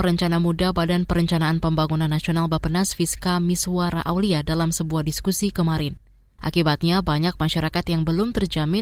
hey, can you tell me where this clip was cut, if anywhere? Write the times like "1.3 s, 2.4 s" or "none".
6.4 s